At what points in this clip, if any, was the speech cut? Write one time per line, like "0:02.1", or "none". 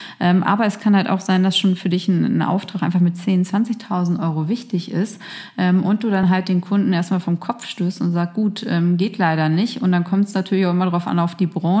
none